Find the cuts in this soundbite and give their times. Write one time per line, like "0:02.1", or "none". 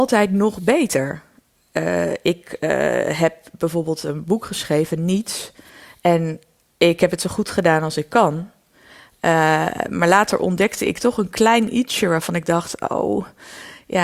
none